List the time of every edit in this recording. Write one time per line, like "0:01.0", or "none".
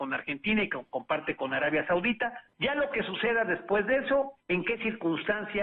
0:02.5
0:04.4